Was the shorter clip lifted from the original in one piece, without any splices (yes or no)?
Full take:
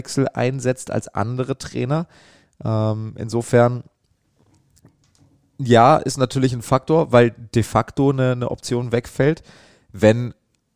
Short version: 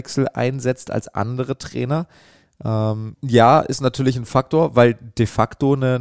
no